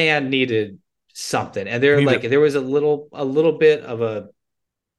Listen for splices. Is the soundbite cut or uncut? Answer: uncut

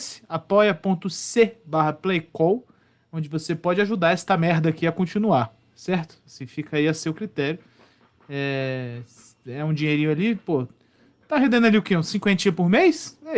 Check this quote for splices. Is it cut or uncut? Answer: uncut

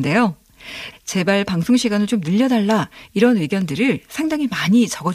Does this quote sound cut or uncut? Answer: cut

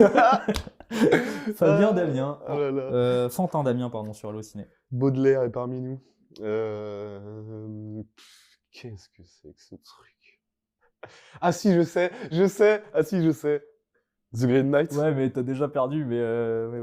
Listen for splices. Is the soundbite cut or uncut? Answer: uncut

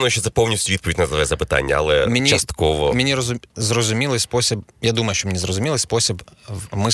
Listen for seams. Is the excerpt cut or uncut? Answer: uncut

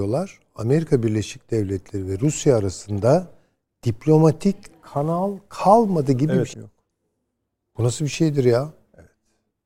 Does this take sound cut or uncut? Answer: cut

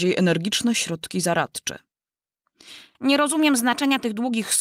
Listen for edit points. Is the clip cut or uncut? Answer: cut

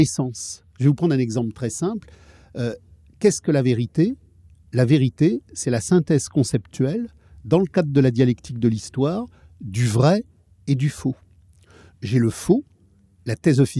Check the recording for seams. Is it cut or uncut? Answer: cut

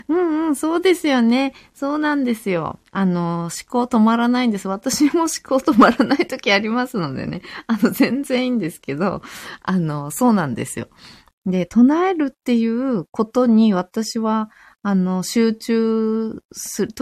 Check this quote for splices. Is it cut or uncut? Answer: uncut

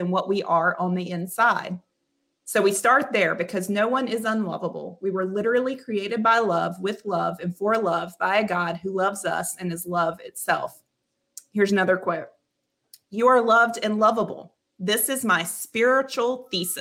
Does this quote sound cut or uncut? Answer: uncut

